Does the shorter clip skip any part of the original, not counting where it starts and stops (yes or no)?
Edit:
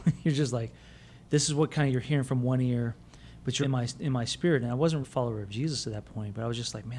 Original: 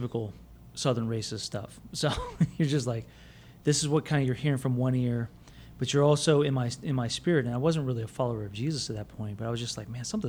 yes